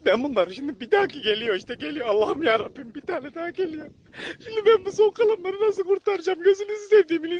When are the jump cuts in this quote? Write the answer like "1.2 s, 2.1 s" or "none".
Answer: none